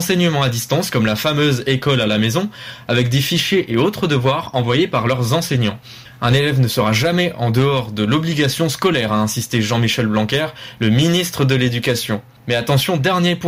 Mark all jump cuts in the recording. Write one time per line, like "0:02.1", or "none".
none